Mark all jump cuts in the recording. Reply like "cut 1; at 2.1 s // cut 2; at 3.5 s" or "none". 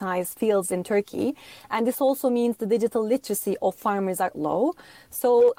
cut 1; at 4.3 s